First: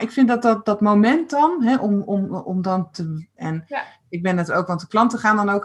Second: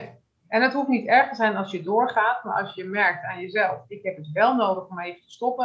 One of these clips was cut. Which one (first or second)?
first